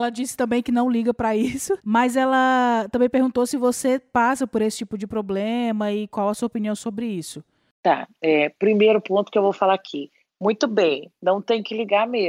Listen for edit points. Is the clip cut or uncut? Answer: cut